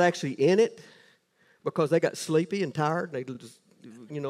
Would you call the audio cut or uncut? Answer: uncut